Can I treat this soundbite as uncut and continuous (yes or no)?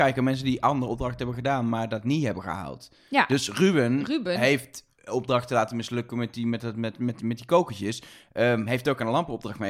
yes